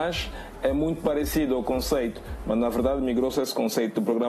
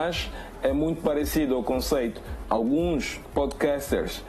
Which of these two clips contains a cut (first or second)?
second